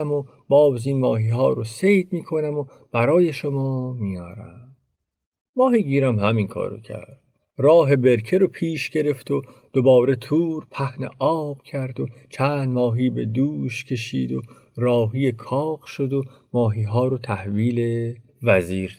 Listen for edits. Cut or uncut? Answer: uncut